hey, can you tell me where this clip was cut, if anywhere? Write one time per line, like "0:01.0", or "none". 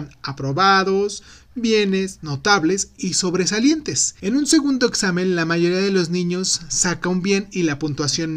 0:04.2